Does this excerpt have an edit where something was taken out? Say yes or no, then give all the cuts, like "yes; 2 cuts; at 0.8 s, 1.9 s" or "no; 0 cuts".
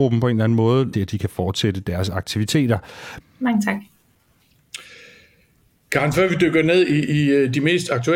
yes; 2 cuts; at 0.9 s, 3.2 s